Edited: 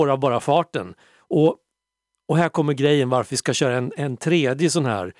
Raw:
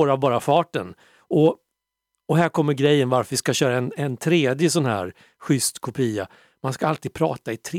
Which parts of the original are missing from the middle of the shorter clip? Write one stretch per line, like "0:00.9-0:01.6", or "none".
none

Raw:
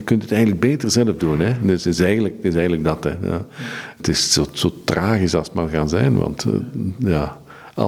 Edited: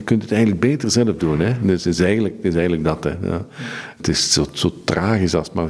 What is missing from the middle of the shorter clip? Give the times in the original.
none

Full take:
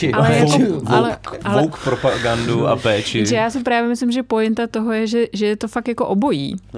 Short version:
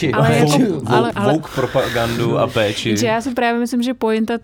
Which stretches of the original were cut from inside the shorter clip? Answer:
0:01.1-0:01.4

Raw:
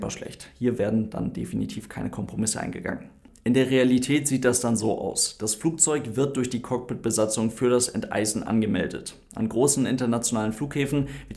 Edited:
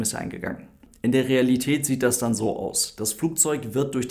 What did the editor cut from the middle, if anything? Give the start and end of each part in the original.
none

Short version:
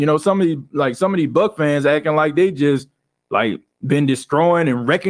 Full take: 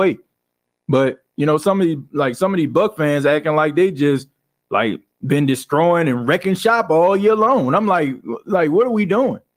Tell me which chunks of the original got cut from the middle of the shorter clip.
none

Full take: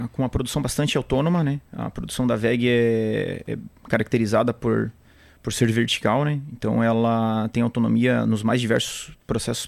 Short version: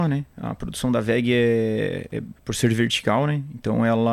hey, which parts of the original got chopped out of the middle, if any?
0:03.7-0:05.3

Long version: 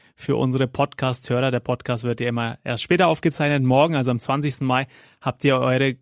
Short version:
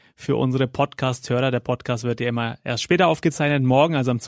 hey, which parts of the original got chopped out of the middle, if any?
none

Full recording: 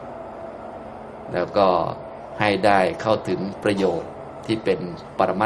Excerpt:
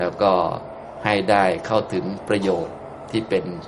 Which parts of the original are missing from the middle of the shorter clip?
none

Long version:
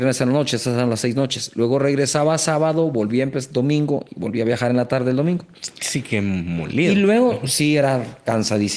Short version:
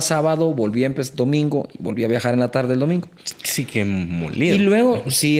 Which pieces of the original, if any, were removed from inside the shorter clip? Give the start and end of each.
none

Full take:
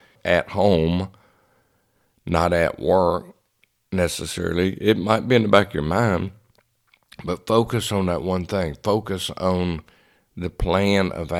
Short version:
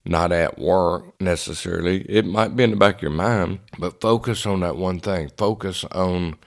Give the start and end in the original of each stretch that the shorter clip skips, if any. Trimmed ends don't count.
0:03.4-0:03.9
0:06.4-0:07.1

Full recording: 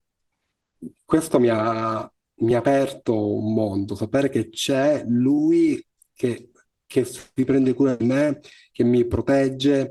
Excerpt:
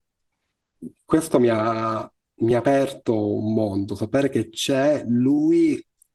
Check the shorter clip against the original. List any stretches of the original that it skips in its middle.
none

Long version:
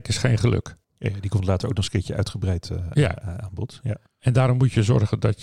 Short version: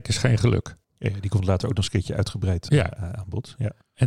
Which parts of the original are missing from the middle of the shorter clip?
0:02.7-0:02.9

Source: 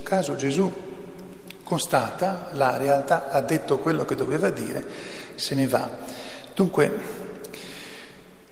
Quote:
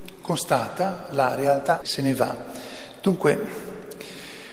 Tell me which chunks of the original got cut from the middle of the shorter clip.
0:03.2-0:05.3

